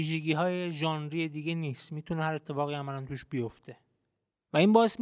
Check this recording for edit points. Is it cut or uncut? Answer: uncut